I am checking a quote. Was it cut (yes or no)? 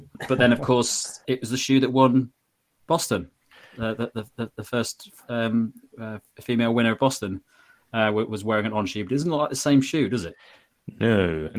no